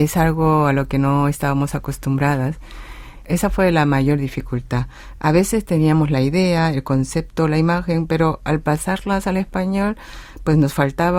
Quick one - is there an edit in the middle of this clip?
no; 0 cuts

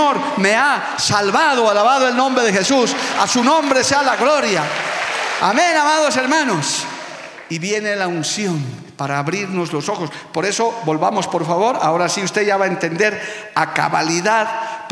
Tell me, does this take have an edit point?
yes; 1 cut; at 5.4 s

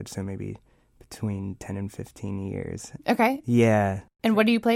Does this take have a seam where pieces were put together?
yes; 1 cut; at 3.0 s

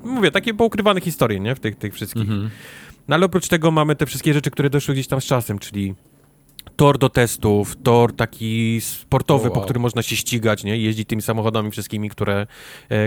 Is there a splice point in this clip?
no; 0 cuts

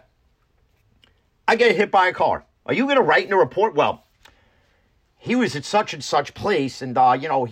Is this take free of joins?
no; 1 cut; at 2.5 s

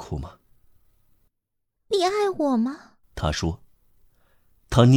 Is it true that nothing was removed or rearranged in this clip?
no; 2 cuts; at 1.8 s, 3.0 s

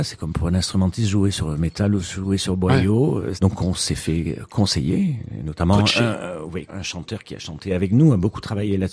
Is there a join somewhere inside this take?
yes; 2 cuts; at 3.4 s, 6.7 s

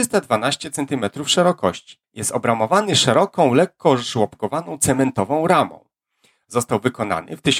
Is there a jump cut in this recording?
yes; 1 cut; at 2.0 s

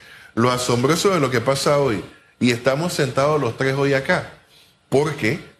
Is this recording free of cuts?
yes; 0 cuts

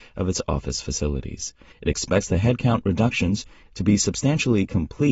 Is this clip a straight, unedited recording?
no; 2 cuts; at 1.7 s, 3.7 s

